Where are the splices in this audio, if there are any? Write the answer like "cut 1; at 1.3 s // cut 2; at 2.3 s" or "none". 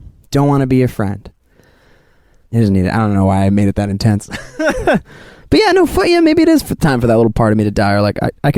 cut 1; at 2.5 s